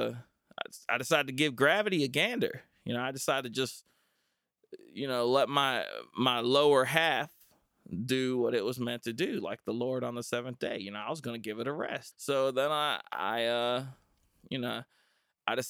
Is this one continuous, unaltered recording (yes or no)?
no